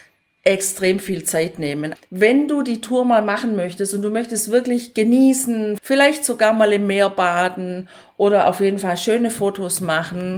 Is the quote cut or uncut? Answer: cut